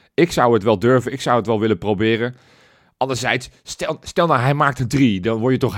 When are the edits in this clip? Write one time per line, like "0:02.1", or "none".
none